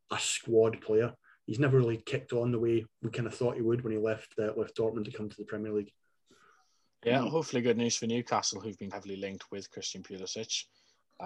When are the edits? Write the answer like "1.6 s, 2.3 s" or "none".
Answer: 8.9 s